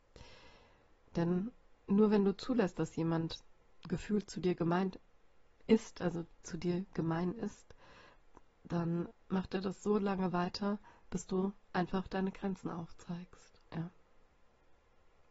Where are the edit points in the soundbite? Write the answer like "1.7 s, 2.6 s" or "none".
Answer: 9.1 s, 13.7 s

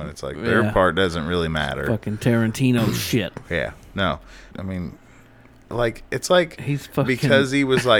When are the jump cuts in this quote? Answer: 4.5 s

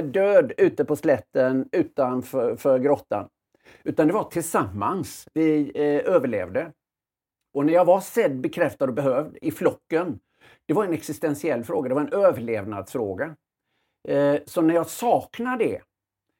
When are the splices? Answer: none

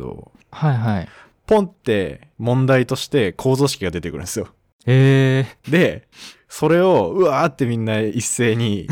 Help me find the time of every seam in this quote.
none

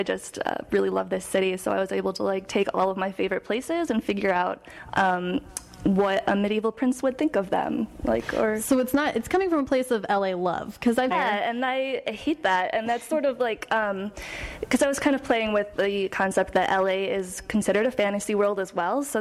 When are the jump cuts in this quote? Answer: 11.1 s

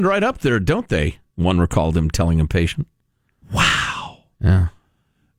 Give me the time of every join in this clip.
none

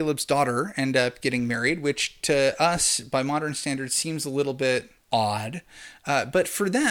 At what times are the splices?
5.0 s

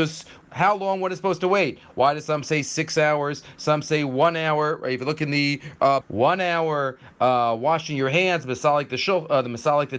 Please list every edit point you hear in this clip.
6.0 s

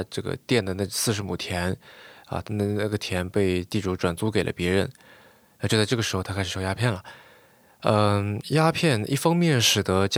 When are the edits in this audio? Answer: none

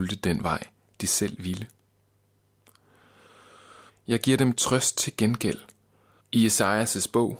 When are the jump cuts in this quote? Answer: 3.9 s, 6.2 s

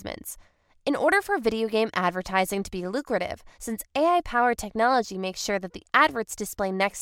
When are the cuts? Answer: 3.5 s

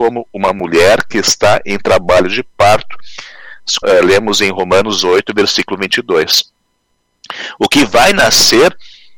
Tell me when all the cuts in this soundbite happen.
3.8 s

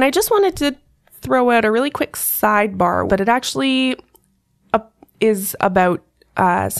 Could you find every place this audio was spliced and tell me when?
3.1 s

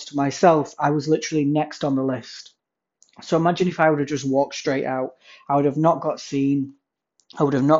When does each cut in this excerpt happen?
none

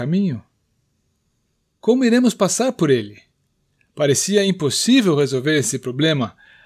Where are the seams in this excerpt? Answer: none

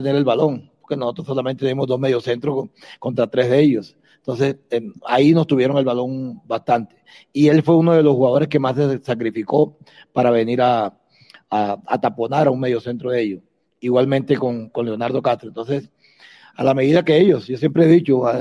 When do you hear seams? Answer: none

